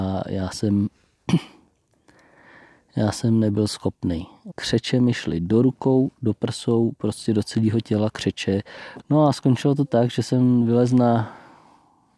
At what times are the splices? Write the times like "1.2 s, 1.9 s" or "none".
4.5 s, 9.0 s